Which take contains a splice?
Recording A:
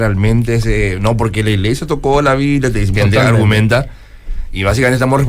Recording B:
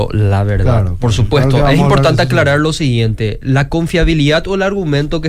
A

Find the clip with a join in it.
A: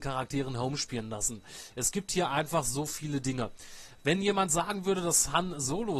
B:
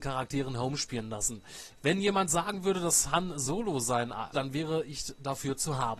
B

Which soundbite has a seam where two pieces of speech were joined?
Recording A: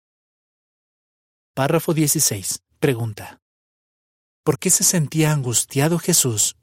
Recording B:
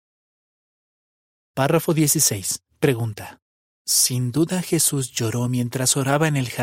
B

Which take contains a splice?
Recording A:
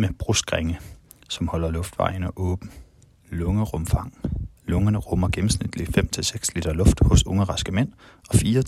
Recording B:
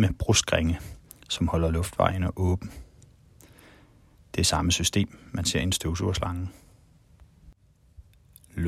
A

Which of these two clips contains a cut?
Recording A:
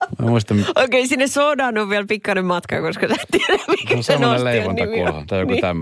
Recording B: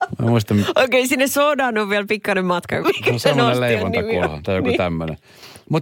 B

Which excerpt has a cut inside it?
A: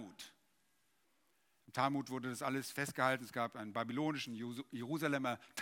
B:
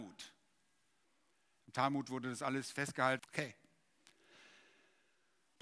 B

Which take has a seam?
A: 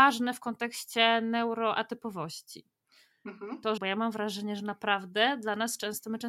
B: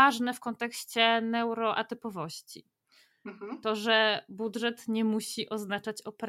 A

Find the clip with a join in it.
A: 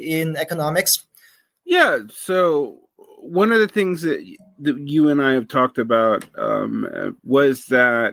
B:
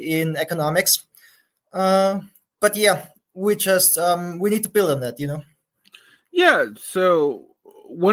A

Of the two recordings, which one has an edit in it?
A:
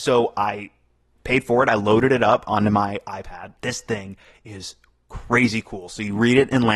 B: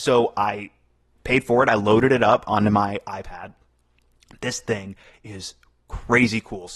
A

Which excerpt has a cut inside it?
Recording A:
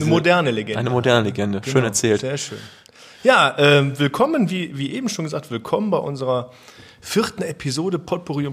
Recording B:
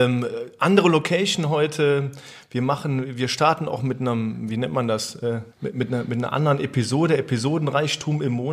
B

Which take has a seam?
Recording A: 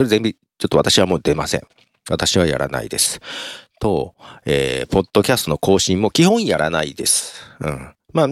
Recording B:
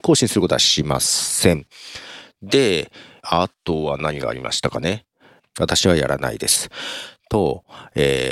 B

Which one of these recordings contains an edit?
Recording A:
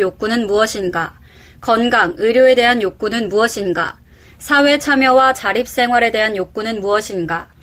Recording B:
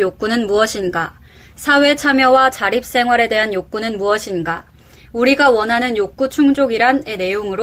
B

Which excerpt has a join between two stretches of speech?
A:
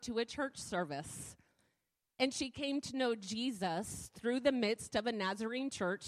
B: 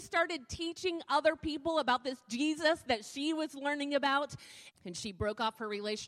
B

